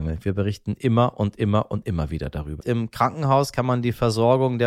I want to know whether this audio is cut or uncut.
cut